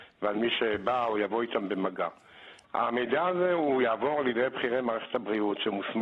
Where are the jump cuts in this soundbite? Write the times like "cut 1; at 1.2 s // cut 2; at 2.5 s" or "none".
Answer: cut 1; at 2.6 s